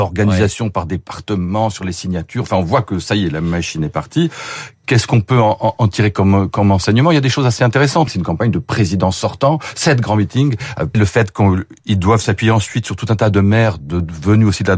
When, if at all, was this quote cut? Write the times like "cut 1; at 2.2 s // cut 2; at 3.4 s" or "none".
cut 1; at 8.1 s // cut 2; at 10.9 s